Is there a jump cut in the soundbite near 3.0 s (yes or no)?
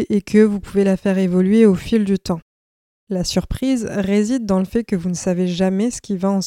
yes